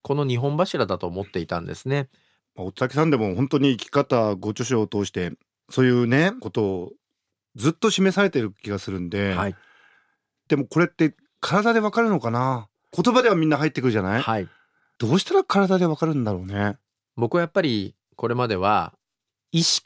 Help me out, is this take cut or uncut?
cut